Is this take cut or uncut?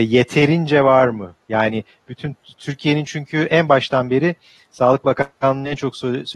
uncut